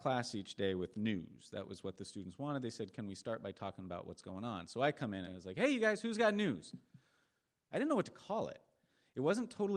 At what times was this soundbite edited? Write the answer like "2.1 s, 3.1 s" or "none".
5.3 s, 7.7 s